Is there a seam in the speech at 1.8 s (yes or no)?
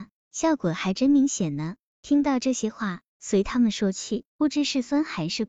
no